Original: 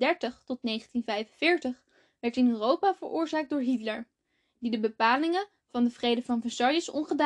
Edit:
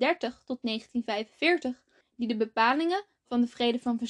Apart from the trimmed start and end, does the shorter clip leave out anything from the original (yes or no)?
yes